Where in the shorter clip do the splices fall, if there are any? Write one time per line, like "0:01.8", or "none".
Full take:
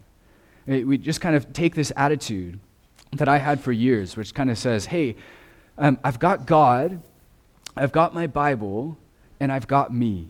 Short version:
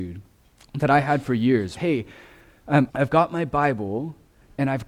0:01.8
0:02.9

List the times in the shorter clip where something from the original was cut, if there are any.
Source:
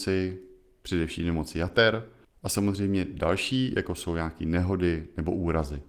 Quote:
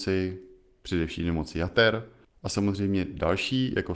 none

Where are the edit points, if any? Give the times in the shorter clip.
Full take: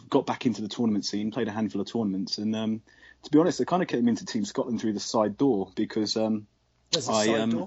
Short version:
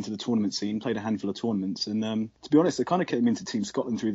0:02.4

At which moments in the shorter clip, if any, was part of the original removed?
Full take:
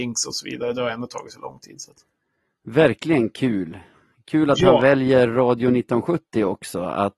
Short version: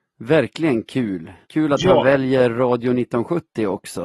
0:01.4

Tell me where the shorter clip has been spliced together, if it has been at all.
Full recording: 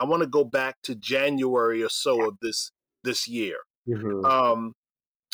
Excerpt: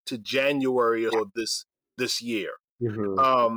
0:01.1

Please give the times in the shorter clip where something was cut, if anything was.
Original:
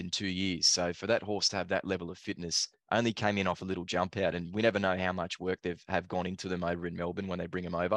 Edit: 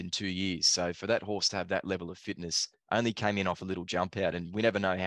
none

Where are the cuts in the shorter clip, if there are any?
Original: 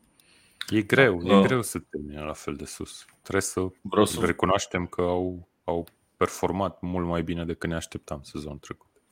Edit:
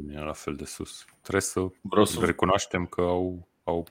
none

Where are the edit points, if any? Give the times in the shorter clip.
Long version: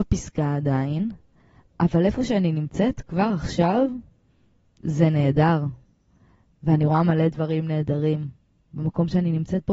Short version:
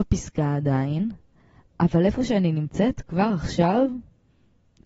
none

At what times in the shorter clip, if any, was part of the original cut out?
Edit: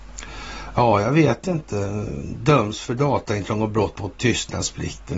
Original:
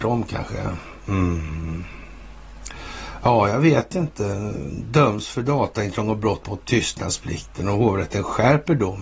none

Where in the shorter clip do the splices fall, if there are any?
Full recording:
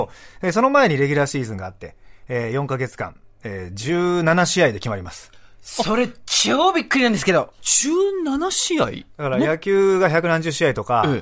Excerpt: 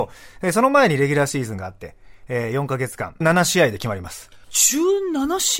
0:03.2
0:04.4

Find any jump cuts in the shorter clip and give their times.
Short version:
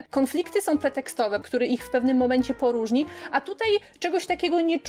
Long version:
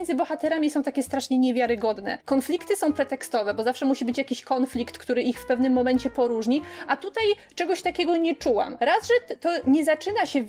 0:01.4

